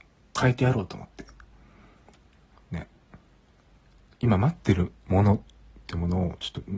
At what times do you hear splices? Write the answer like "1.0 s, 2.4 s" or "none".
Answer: none